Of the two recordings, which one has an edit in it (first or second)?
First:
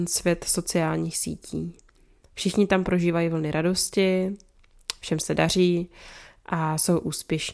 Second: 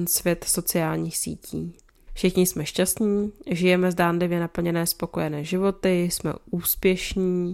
second